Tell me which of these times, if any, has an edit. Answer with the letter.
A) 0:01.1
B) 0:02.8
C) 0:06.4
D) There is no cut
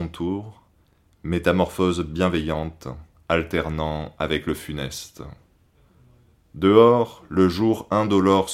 D